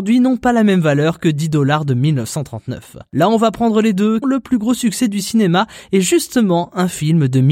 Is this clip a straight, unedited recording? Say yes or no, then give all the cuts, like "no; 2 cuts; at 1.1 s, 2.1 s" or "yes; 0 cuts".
no; 1 cut; at 4.2 s